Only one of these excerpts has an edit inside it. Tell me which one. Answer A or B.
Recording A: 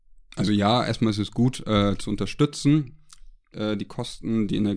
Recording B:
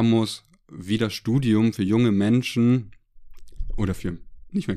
A